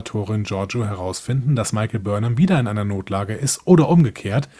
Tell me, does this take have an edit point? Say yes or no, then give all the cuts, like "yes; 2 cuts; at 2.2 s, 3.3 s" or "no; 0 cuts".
no; 0 cuts